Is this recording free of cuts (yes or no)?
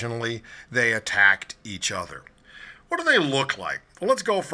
yes